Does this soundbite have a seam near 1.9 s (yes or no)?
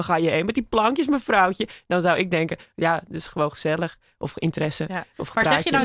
no